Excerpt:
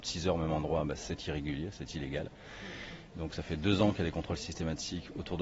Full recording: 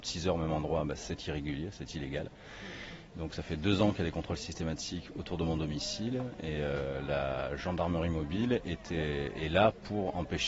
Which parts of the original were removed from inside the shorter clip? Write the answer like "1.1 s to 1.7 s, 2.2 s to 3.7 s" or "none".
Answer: none